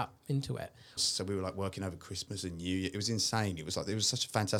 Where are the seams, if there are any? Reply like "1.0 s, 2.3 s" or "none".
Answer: 1.0 s